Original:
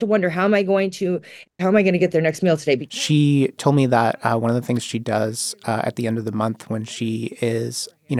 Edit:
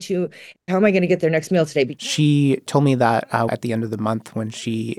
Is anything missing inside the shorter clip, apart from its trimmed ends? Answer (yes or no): yes